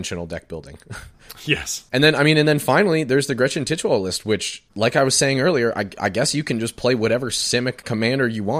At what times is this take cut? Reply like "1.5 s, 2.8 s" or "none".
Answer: none